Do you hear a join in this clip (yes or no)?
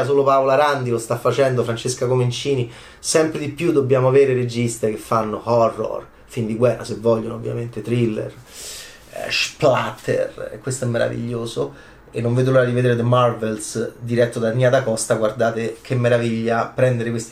no